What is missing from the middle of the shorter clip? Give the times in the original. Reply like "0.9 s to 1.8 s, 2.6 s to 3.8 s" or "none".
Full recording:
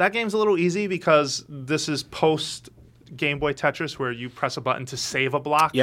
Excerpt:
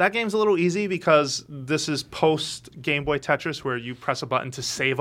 2.7 s to 3.1 s